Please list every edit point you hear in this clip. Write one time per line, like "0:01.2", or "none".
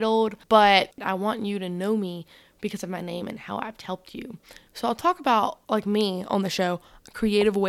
0:04.7